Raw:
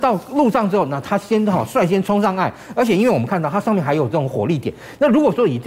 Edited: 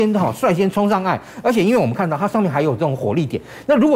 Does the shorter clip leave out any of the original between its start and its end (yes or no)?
no